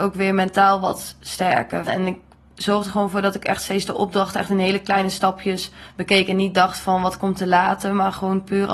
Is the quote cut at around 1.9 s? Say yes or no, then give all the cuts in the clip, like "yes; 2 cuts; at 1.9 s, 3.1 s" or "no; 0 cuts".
yes; 1 cut; at 1.9 s